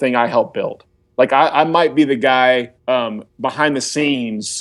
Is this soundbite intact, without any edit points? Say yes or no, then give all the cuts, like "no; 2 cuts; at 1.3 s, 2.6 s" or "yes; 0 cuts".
no; 2 cuts; at 1.0 s, 2.8 s